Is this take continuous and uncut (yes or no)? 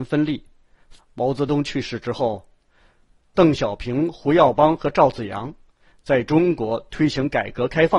no